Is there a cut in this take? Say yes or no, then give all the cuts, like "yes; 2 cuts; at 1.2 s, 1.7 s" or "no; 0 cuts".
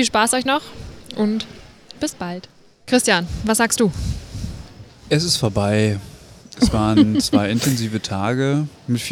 yes; 1 cut; at 2.9 s